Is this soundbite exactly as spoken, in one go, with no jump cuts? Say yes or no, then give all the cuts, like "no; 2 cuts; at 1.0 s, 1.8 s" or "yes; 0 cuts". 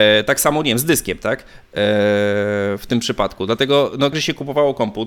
no; 1 cut; at 4.1 s